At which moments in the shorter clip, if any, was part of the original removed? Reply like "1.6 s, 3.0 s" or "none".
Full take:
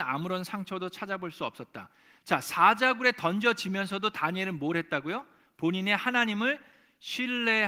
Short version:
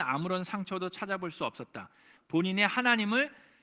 2.2 s